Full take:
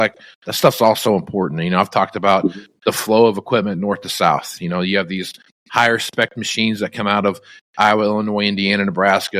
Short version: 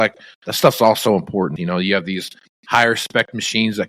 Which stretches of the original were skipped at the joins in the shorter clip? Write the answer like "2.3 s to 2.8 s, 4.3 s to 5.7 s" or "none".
1.6 s to 4.6 s